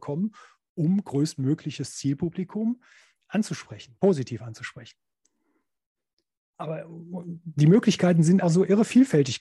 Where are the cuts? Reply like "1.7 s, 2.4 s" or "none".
8.4 s

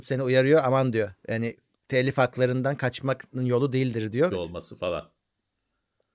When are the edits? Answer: 4.3 s

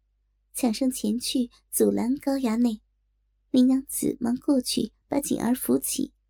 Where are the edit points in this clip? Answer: 3.5 s

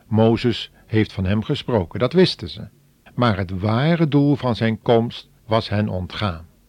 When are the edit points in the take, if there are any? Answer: 3.1 s, 5.4 s

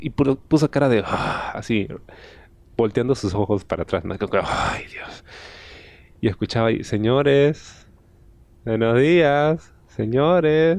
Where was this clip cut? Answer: none

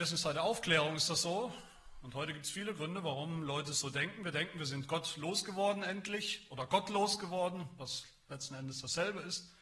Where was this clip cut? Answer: none

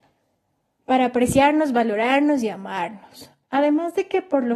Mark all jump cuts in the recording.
3.4 s

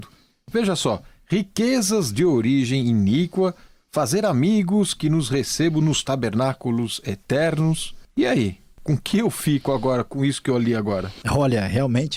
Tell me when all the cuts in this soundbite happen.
none

